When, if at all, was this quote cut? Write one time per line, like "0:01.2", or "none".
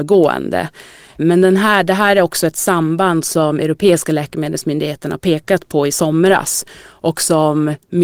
none

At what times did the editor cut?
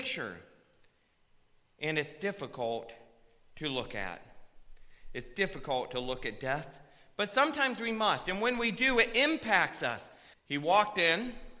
0:10.3

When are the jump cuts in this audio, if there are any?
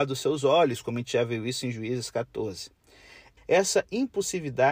0:03.4

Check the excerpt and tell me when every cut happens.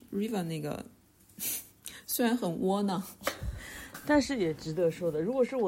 0:03.9

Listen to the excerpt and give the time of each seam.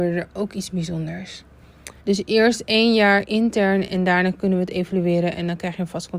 0:02.0

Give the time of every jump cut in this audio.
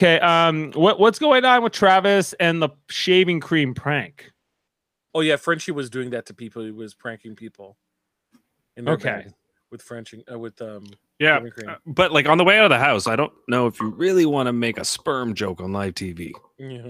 none

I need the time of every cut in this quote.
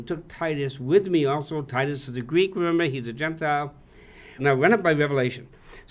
0:04.4

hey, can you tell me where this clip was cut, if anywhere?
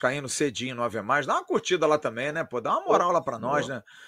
none

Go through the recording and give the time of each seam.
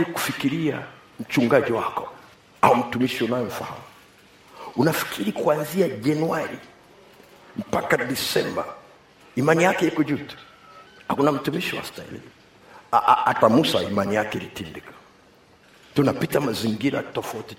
none

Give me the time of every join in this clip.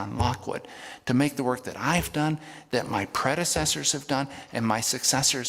none

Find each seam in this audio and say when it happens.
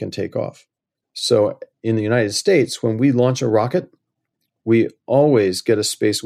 0:01.2

